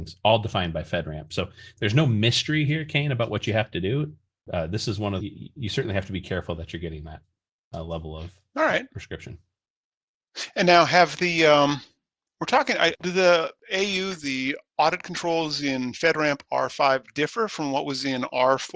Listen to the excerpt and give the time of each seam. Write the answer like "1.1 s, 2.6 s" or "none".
5.2 s, 12.9 s